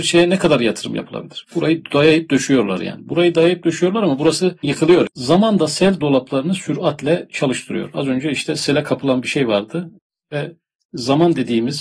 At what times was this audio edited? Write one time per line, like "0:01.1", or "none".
0:01.4
0:05.1